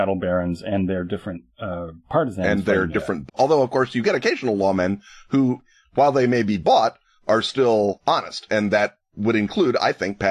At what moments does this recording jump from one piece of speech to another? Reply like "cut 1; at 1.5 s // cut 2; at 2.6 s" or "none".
cut 1; at 3.3 s